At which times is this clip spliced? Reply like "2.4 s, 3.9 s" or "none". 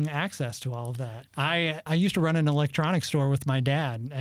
1.3 s